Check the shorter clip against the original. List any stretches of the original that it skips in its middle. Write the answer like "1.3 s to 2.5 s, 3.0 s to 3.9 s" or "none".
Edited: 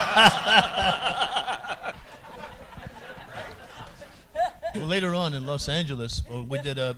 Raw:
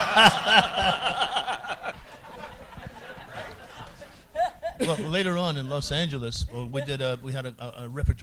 4.7 s to 5.0 s